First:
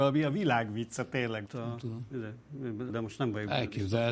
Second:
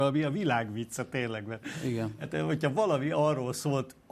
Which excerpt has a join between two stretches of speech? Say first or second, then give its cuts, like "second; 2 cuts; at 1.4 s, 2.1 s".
first; 2 cuts; at 1.4 s, 2.9 s